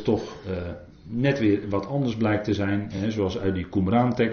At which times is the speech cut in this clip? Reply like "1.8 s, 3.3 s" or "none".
none